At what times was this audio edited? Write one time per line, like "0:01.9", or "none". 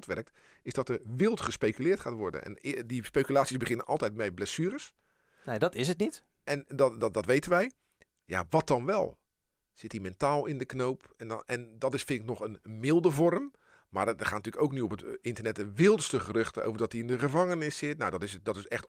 none